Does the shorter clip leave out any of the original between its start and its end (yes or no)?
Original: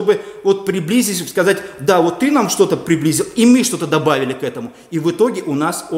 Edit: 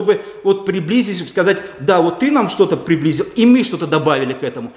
no